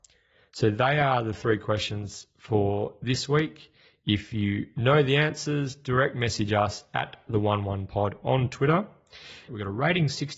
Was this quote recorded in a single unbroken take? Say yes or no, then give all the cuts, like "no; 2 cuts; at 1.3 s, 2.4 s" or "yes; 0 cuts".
no; 1 cut; at 9.5 s